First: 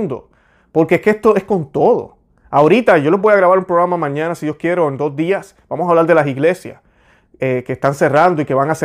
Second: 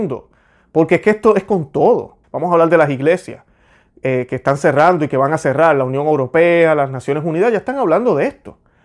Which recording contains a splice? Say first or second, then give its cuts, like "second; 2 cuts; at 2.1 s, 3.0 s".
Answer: second; 1 cut; at 2.2 s